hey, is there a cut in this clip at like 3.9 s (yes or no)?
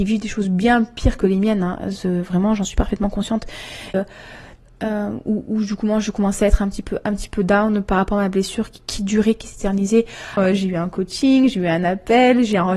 yes